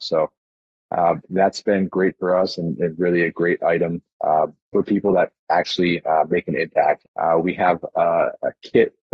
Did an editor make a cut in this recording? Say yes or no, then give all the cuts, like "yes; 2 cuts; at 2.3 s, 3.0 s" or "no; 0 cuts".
yes; 1 cut; at 7.0 s